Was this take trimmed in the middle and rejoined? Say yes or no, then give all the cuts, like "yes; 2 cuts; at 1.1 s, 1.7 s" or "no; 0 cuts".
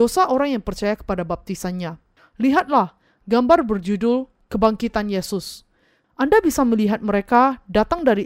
yes; 2 cuts; at 2.2 s, 6.0 s